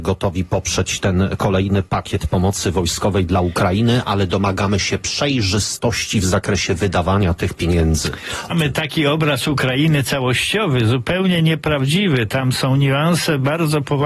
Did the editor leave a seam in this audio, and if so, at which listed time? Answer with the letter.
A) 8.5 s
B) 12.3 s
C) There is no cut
A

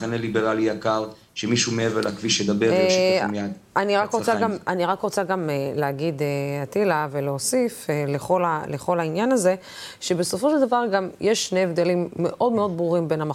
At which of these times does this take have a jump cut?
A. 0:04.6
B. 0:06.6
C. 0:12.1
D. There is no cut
D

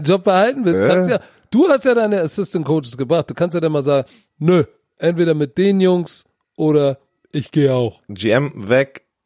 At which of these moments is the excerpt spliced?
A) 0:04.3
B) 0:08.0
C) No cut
B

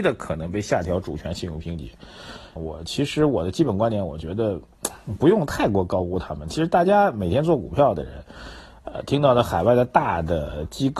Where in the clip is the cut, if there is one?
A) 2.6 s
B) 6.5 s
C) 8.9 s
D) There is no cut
A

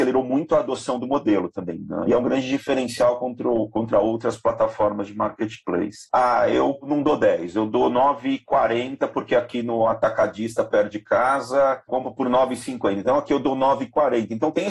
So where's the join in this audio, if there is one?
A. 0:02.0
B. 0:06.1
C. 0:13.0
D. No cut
B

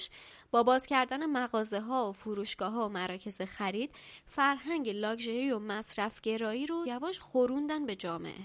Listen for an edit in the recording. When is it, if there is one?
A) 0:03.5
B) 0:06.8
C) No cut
B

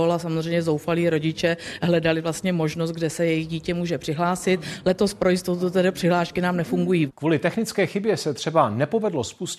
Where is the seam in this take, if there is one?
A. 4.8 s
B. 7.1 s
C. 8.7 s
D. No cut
B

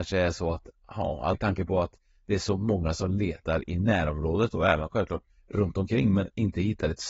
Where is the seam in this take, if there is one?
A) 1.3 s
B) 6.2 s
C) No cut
A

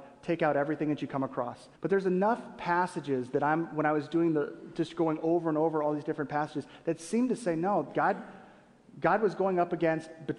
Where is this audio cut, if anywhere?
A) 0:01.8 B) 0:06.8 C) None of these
A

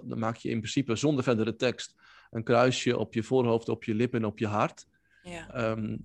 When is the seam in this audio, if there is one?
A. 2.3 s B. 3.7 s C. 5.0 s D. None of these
D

